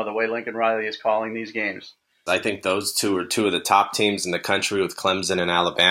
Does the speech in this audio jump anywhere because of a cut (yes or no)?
yes